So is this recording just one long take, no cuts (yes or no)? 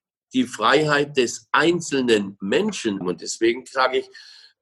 no